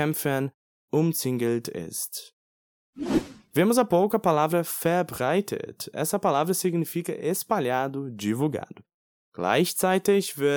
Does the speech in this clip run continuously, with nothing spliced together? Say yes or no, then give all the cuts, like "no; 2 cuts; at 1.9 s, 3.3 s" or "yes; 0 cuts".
no; 1 cut; at 9.1 s